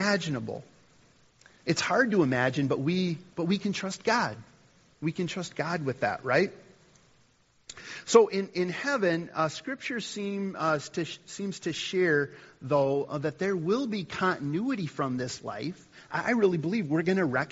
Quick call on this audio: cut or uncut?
cut